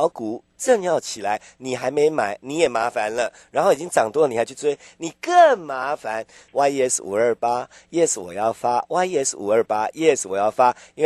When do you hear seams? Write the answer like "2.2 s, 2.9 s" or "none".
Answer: 6.5 s